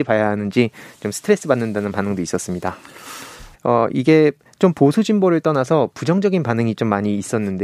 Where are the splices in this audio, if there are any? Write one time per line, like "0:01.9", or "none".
0:03.5

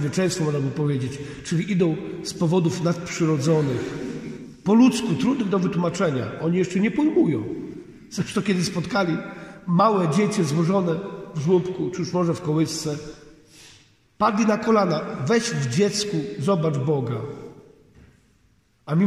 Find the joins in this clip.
none

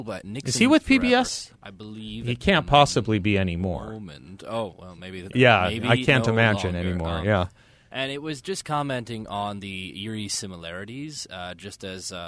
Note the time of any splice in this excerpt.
0:05.3

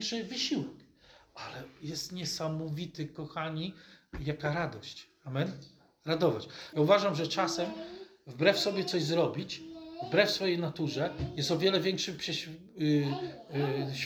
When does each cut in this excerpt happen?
0:06.7

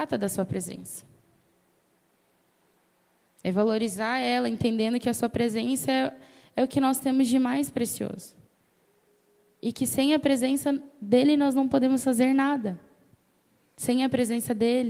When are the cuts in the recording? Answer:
none

